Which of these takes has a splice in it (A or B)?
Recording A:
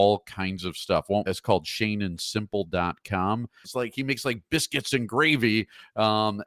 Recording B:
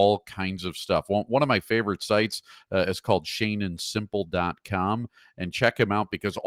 A